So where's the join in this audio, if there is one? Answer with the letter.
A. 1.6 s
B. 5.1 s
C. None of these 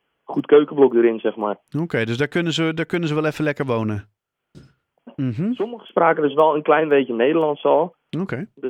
B